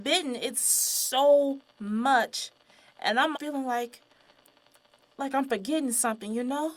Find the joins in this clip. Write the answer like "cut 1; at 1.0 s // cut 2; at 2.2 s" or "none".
cut 1; at 3.3 s